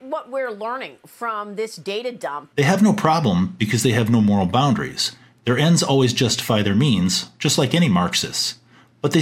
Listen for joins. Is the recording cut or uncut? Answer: cut